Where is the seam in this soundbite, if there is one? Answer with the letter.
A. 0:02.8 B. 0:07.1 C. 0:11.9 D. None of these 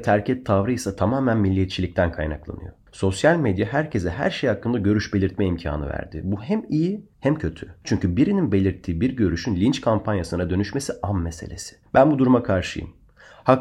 B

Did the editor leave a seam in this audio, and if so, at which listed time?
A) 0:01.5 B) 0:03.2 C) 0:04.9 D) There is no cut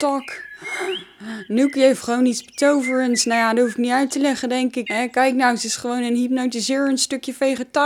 C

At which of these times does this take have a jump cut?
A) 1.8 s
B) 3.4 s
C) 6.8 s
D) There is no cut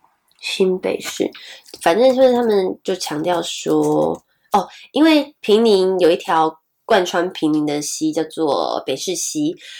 D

